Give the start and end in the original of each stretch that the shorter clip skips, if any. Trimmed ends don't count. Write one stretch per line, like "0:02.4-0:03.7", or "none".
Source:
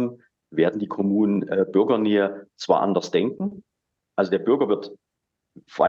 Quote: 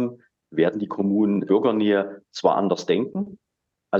0:01.5-0:01.7